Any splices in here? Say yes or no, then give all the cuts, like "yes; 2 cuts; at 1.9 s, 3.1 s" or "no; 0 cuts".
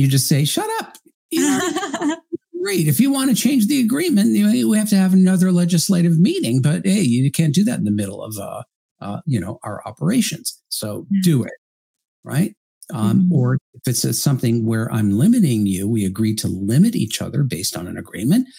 yes; 1 cut; at 9.2 s